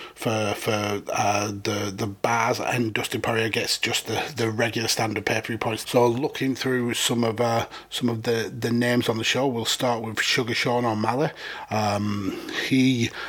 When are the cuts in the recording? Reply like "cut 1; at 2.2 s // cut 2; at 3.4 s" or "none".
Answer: cut 1; at 5.8 s